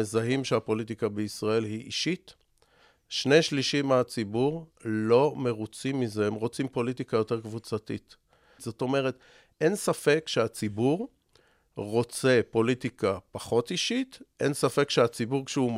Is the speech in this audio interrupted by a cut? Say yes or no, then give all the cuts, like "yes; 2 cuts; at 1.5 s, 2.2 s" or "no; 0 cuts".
yes; 1 cut; at 8.6 s